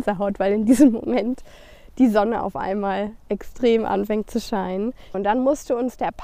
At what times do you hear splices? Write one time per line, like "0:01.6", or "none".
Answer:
0:05.1